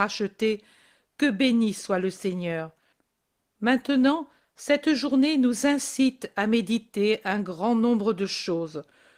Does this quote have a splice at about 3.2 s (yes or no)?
no